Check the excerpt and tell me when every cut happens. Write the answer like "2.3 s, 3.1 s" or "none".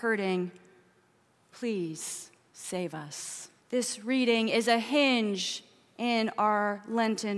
3.6 s